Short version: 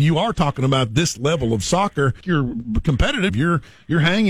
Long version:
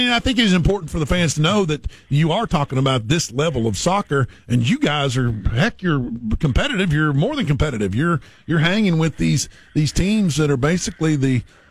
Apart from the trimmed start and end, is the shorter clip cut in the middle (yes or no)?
yes